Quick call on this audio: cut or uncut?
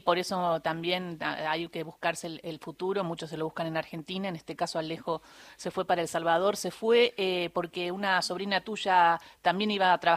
uncut